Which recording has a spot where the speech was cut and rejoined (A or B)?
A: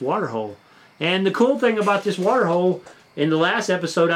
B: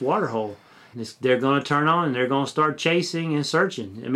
B